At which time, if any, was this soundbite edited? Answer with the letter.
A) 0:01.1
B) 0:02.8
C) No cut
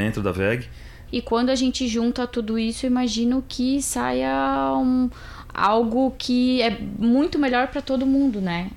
A